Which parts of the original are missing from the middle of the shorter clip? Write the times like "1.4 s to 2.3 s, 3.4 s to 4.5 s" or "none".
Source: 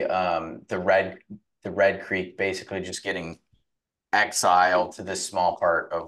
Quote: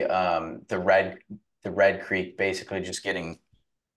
none